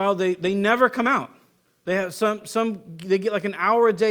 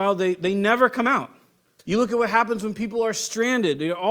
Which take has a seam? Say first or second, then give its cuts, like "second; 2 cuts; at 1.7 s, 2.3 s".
second; 1 cut; at 1.8 s